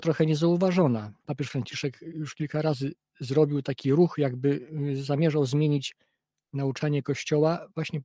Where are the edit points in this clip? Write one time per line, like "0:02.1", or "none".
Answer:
0:01.2

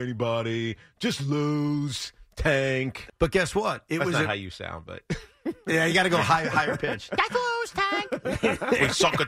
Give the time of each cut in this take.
0:03.1

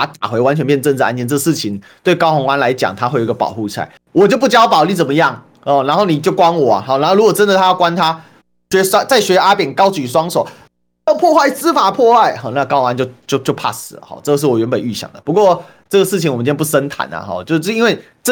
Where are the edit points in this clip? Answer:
0:04.0

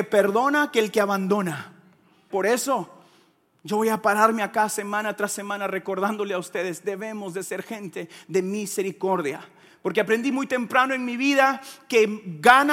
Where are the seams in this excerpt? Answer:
0:02.3

